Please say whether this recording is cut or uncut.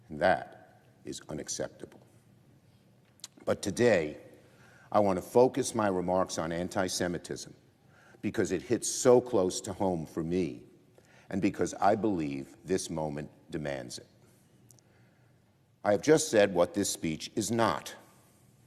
uncut